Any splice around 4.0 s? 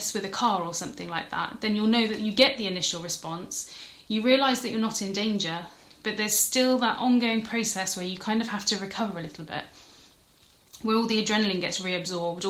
no; 0 cuts

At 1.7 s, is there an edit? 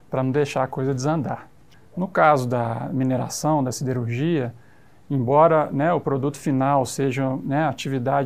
yes; 1 cut; at 1.7 s

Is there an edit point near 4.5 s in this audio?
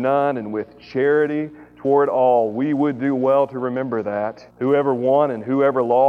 yes; 1 cut; at 4.5 s

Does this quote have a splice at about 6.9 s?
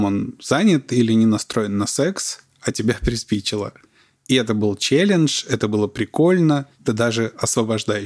yes; 1 cut; at 6.9 s

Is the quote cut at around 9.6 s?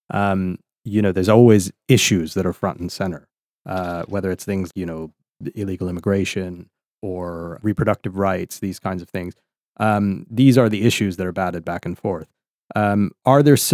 no; 1 cut; at 4.7 s

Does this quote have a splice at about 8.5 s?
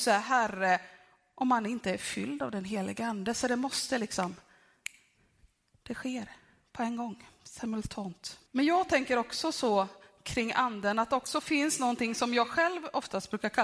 yes; 1 cut; at 8.5 s

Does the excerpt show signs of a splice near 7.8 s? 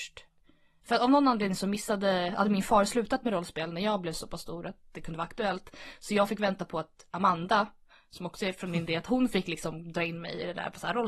no; 0 cuts

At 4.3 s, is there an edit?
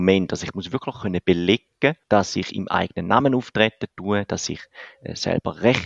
no; 1 cut; at 2.0 s

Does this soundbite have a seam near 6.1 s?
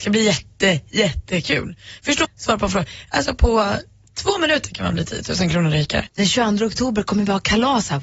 yes; 2 cuts; at 2.2 s, 6.1 s

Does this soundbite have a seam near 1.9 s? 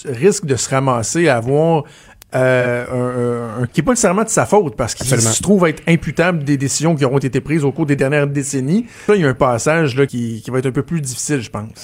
no; 3 cuts; at 3.7 s, 9.1 s, 10.1 s

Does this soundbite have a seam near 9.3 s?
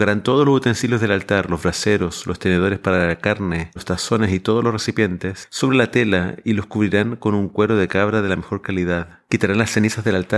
yes; 2 cuts; at 3.8 s, 9.3 s

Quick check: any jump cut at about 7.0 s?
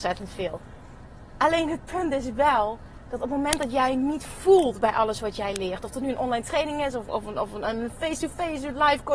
yes; 1 cut; at 7.0 s

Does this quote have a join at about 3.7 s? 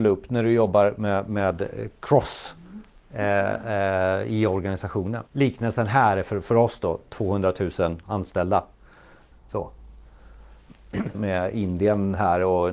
no; 3 cuts; at 5.3 s, 9.3 s, 11.1 s

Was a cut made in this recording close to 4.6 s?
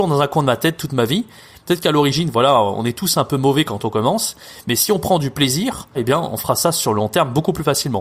no; 2 cuts; at 1.5 s, 5.9 s

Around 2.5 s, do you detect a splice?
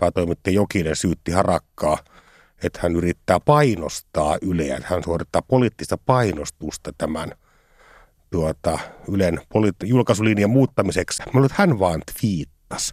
no; 2 cuts; at 9.8 s, 11.2 s

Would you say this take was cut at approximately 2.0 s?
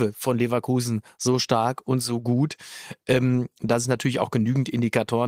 no; 0 cuts

